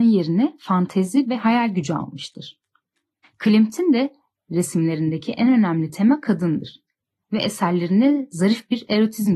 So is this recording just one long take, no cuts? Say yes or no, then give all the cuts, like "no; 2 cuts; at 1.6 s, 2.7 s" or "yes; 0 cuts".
no; 1 cut; at 3.2 s